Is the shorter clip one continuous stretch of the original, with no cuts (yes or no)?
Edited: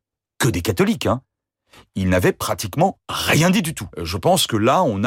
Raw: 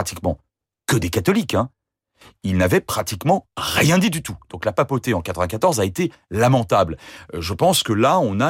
no